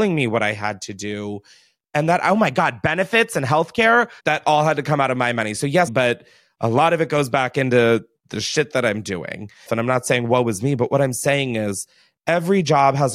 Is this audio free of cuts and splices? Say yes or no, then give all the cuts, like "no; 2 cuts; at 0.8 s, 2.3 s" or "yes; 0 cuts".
no; 3 cuts; at 4.2 s, 5.9 s, 9.7 s